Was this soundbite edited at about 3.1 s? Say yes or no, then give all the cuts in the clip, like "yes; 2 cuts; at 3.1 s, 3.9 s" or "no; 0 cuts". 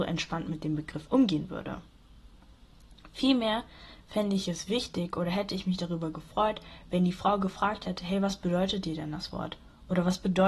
no; 0 cuts